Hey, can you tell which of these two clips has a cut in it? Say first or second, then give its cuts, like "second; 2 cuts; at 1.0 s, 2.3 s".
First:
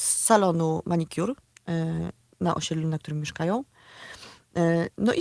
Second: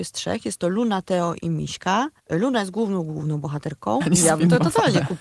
second; 2 cuts; at 2.2 s, 4.0 s